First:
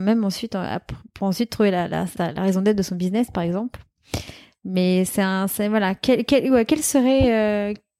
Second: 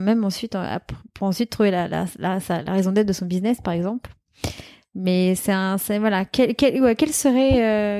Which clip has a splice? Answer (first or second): first